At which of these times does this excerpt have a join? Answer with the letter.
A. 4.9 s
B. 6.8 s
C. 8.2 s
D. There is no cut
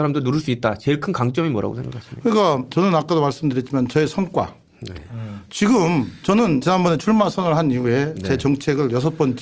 A